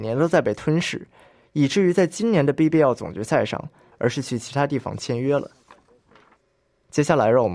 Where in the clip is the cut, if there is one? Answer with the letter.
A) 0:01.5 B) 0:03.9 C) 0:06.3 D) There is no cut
B